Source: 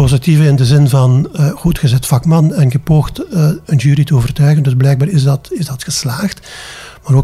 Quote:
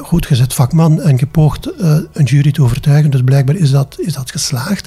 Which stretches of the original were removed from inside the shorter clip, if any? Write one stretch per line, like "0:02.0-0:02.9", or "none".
none